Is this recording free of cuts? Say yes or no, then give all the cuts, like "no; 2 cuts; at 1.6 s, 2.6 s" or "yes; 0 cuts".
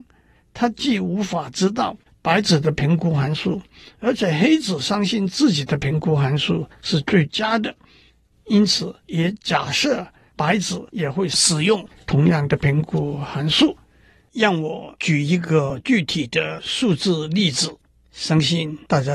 yes; 0 cuts